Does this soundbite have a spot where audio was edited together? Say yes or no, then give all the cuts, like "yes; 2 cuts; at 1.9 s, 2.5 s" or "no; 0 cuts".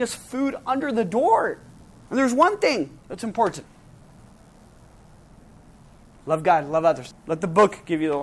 yes; 2 cuts; at 2.1 s, 7.1 s